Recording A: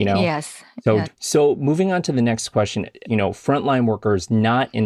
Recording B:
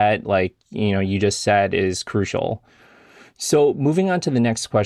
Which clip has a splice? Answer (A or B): A